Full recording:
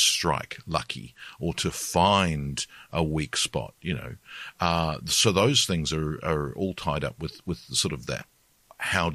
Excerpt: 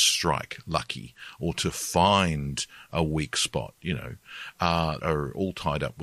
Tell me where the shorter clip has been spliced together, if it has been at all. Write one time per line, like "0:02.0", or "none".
0:05.0